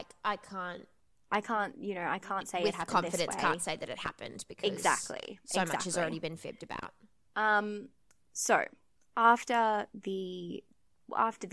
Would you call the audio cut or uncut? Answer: uncut